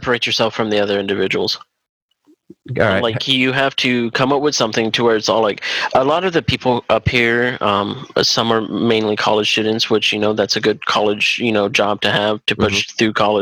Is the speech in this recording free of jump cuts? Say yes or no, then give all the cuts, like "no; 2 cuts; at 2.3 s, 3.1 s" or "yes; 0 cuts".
yes; 0 cuts